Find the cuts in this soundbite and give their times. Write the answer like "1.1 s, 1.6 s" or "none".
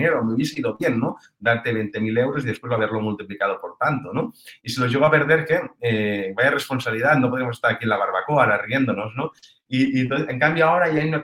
4.6 s